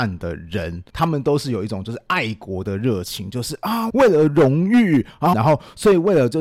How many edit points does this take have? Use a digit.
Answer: 2